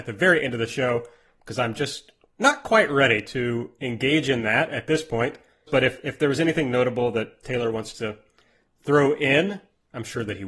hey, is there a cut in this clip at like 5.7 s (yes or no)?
yes